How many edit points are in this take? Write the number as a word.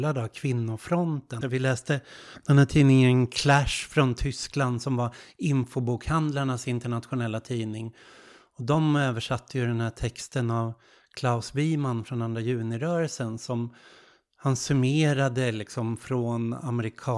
one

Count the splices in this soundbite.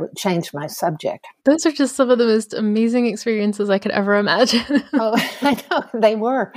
one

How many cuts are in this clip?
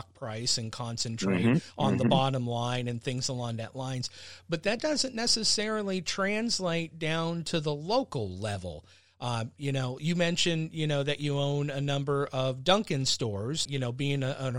one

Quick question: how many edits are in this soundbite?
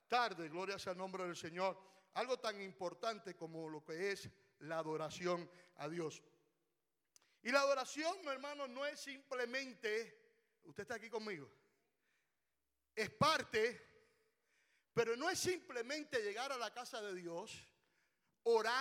zero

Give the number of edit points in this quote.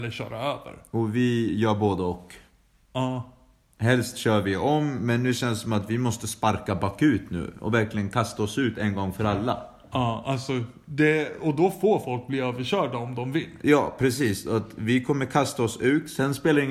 zero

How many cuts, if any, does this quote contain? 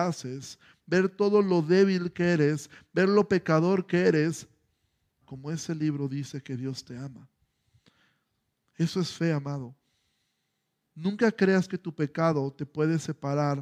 one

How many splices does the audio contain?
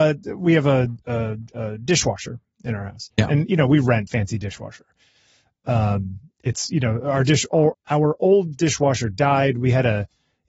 two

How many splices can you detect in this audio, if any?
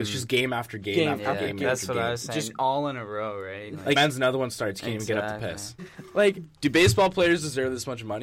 two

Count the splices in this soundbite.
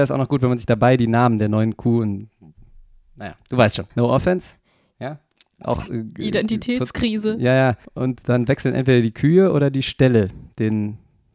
two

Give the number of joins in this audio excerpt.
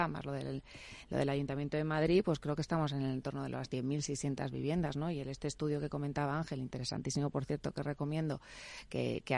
zero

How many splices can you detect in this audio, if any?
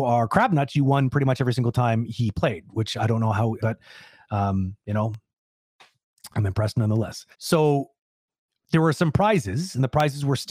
two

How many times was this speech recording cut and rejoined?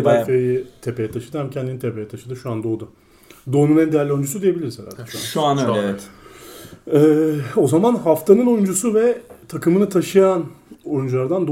zero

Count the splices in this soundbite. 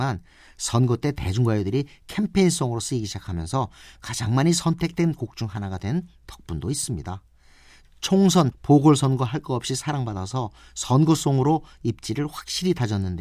one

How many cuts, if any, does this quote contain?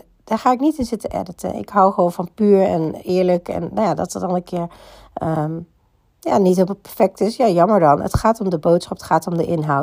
zero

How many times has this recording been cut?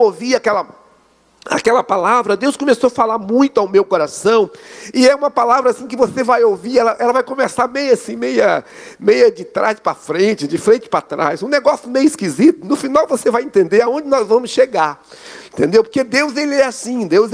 zero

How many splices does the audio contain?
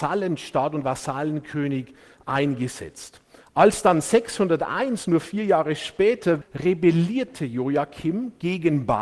one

